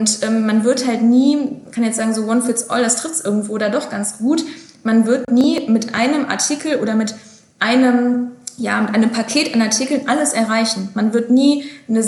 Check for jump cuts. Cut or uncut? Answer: uncut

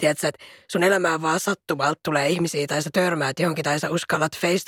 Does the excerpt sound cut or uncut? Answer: uncut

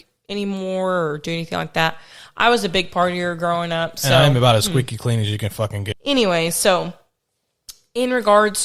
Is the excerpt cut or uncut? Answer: cut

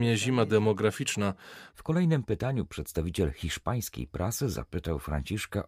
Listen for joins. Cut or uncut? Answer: cut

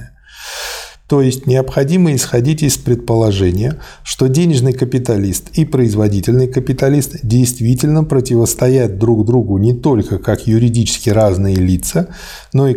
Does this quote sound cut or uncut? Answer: cut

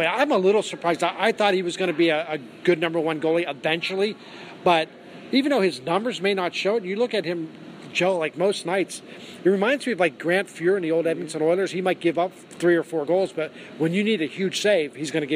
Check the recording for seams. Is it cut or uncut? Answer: uncut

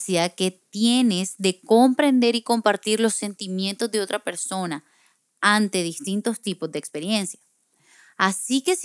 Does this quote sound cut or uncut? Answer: uncut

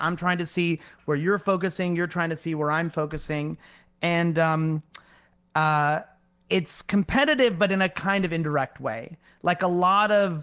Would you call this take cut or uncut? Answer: uncut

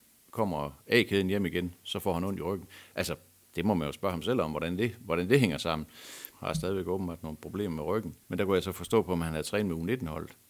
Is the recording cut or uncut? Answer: cut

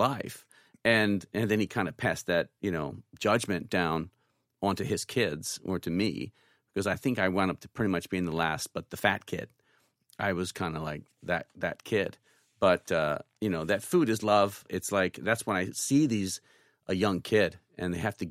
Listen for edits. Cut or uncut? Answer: cut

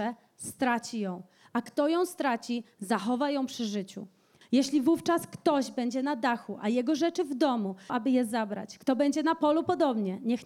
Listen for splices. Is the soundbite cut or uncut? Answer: cut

